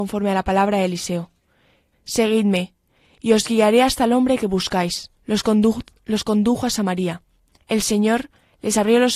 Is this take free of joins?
no; 3 cuts; at 1.9 s, 5.2 s, 7.5 s

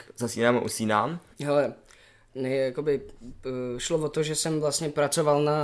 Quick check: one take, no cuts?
no; 1 cut; at 1.3 s

